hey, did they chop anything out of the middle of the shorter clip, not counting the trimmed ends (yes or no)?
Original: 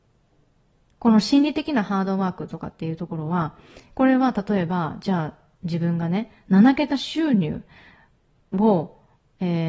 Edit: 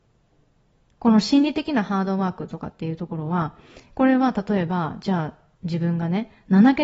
no